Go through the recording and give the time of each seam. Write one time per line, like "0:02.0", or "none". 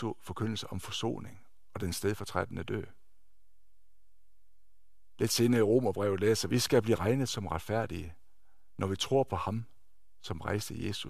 0:06.5